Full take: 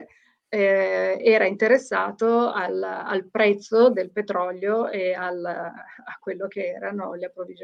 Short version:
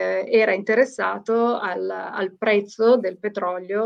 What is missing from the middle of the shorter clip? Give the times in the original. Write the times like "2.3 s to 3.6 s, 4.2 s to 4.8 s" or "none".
none